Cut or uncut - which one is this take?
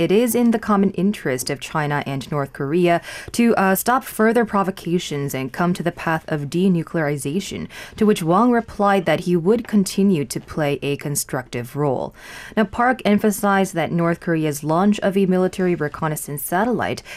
cut